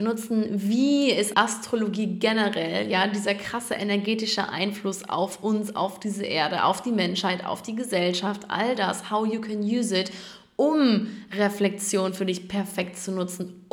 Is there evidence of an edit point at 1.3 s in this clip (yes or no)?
yes